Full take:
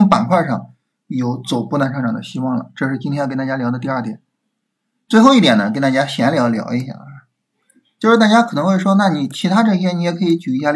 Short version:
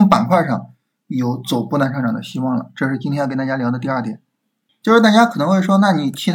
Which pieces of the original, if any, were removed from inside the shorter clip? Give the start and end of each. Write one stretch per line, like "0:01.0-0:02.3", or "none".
0:04.7-0:07.9